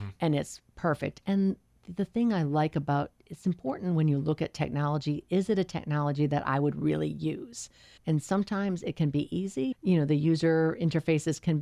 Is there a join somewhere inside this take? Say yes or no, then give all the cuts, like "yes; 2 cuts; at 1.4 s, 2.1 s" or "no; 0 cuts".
yes; 2 cuts; at 8.0 s, 9.7 s